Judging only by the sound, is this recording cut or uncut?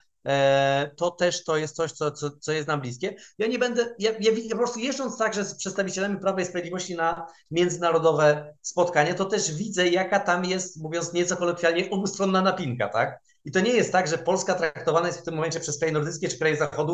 uncut